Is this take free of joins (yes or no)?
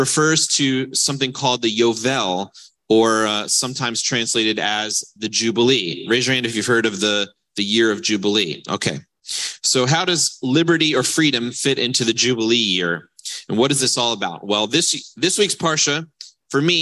yes